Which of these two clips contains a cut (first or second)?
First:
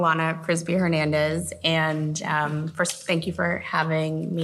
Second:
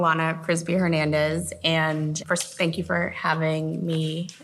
second